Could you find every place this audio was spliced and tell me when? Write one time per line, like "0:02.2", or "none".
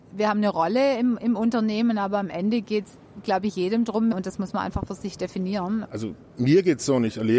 0:04.1
0:05.8